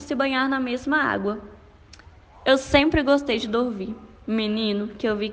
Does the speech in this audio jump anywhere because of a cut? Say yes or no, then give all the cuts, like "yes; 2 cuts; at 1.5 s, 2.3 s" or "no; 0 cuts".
no; 0 cuts